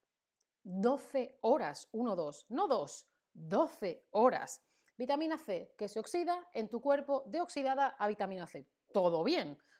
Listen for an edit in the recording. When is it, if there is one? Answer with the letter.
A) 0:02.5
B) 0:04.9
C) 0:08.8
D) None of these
B